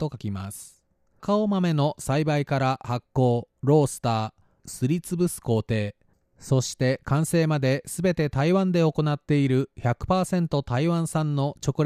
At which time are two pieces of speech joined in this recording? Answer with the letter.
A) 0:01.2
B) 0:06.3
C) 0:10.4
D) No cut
A